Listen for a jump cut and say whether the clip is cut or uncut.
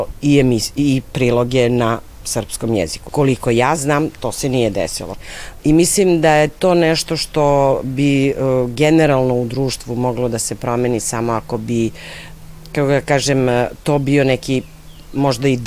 cut